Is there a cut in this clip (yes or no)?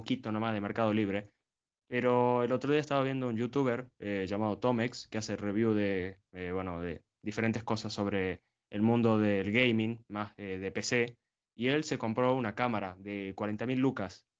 no